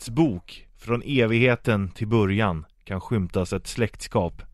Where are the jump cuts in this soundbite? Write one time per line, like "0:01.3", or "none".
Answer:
none